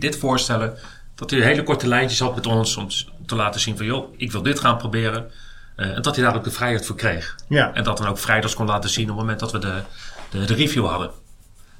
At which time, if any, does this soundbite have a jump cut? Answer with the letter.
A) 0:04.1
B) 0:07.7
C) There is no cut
A